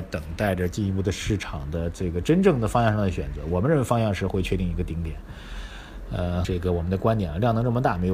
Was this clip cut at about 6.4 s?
yes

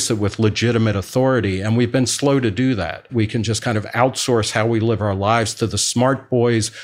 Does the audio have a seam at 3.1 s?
yes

